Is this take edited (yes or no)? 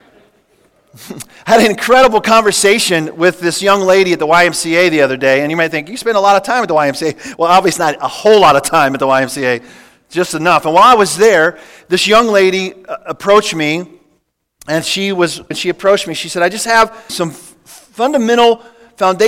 yes